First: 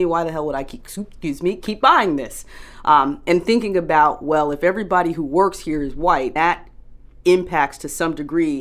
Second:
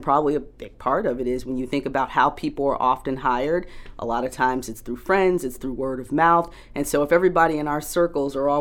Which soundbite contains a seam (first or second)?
first